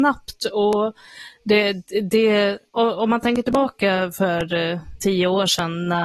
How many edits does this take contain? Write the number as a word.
two